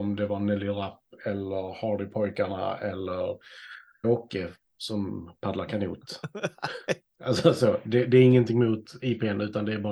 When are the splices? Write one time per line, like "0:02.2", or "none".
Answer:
0:04.0